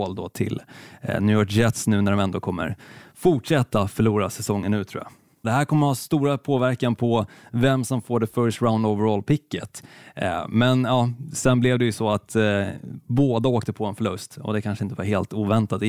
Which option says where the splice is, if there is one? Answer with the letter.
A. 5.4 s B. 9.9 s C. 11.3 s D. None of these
A